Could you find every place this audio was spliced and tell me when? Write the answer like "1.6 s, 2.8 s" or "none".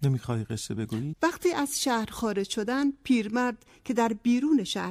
1.1 s